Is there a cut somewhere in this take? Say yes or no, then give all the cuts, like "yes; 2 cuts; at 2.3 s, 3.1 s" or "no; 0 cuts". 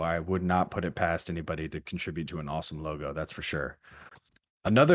no; 0 cuts